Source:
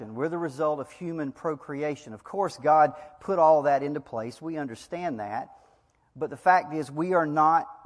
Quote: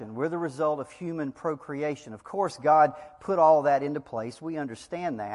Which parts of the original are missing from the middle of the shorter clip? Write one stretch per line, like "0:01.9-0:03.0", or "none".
none